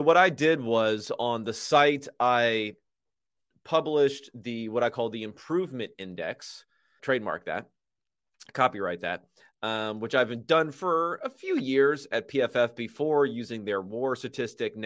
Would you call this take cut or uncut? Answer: cut